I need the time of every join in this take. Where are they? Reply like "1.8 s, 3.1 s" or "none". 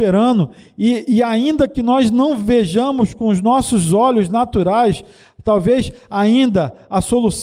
none